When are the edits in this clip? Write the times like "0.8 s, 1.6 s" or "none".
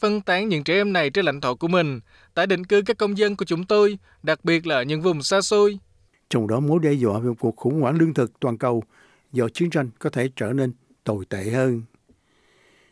none